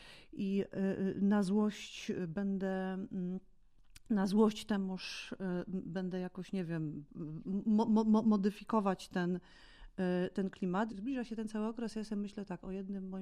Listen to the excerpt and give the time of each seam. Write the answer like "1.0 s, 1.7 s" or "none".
10.9 s